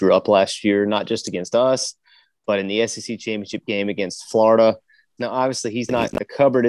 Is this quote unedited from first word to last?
no; 1 cut; at 5.2 s

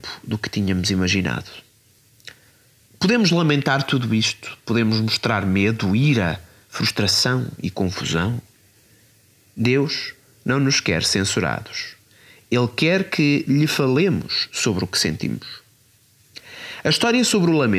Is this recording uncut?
yes; 0 cuts

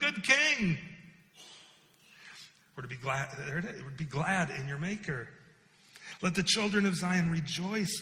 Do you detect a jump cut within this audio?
yes; 1 cut; at 2.6 s

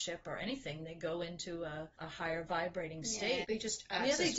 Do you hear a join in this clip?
yes; 2 cuts; at 1.9 s, 3.4 s

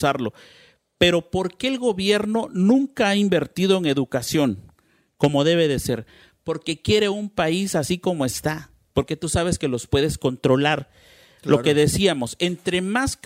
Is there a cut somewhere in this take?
no; 0 cuts

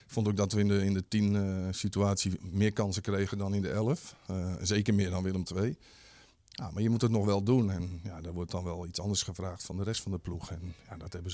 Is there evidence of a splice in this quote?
no; 0 cuts

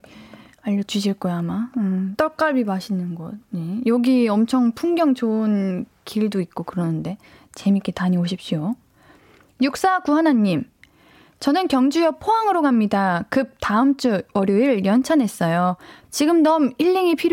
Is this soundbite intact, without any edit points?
no; 2 cuts; at 2.2 s, 16.0 s

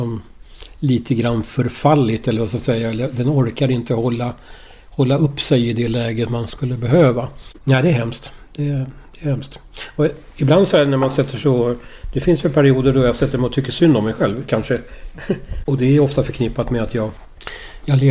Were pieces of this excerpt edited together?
yes; 1 cut; at 7.5 s

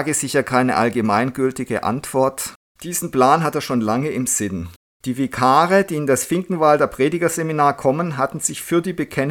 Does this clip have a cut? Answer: yes; 1 cut; at 2.7 s

